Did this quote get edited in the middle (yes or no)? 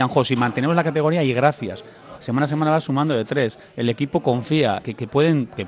yes